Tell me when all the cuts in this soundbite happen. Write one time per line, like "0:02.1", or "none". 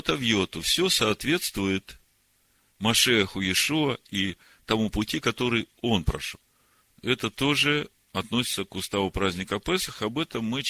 0:06.8